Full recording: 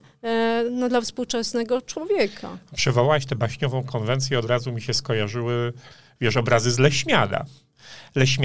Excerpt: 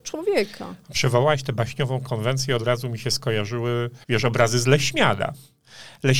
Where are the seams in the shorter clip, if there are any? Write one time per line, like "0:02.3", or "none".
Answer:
0:04.0